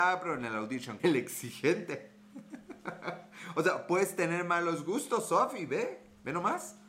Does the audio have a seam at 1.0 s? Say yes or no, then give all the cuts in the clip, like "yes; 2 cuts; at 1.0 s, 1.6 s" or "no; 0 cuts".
yes; 1 cut; at 1.0 s